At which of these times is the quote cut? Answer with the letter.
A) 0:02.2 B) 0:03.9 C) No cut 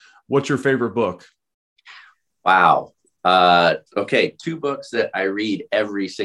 B